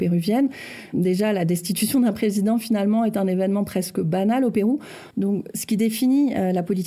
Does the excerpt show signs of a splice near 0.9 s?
no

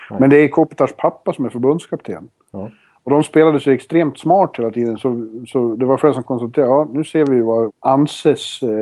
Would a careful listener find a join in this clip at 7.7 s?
yes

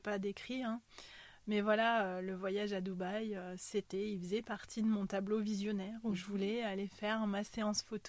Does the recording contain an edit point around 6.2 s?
no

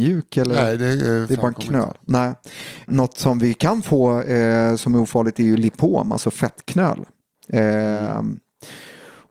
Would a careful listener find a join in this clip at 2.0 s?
no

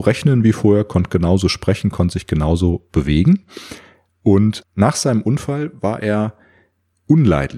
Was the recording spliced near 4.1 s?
yes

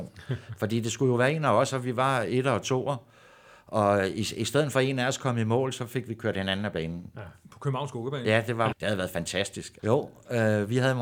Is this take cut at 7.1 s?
no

